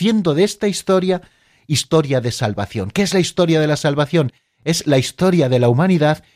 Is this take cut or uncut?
uncut